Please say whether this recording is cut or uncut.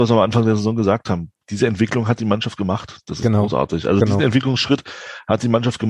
uncut